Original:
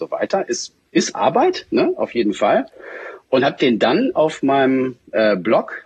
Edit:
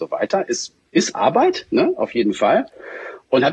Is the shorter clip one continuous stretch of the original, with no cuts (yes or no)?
yes